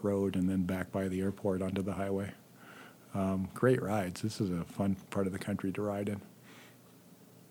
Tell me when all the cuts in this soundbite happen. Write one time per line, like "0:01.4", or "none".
0:05.0